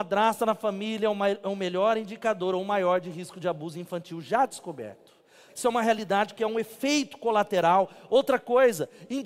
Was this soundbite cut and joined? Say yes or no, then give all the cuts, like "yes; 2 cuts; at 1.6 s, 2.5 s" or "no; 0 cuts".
yes; 1 cut; at 5.5 s